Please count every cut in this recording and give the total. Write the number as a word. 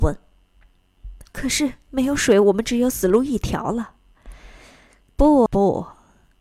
two